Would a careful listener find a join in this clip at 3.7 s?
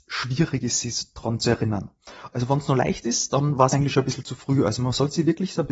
no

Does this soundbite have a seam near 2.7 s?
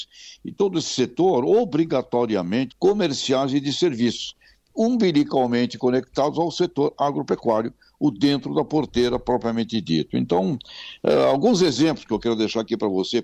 yes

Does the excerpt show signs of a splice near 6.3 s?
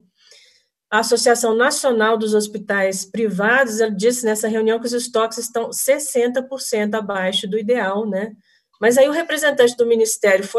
no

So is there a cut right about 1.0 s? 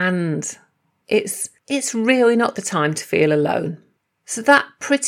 yes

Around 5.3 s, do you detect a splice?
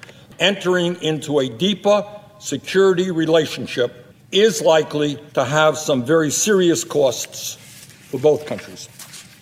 yes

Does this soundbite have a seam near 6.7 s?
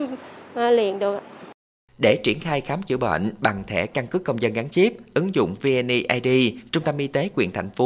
yes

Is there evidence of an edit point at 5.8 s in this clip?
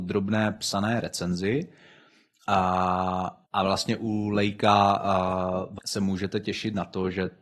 yes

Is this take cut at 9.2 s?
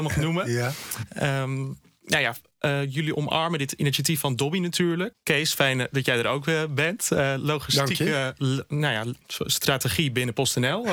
yes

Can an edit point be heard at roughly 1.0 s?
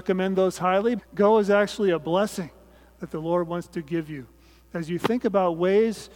yes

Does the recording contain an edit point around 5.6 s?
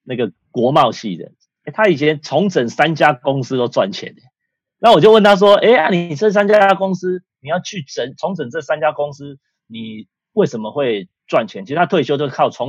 no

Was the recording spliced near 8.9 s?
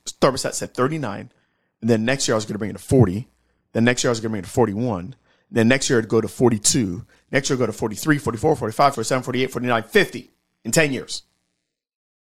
yes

